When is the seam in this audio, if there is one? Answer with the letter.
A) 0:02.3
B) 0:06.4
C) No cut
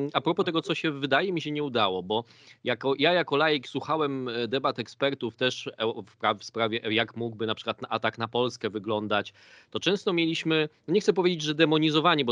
C